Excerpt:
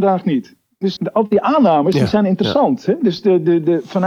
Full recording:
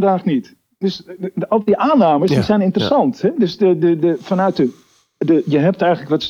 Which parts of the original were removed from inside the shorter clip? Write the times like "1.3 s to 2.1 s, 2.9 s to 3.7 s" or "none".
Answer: 1.0 s to 1.3 s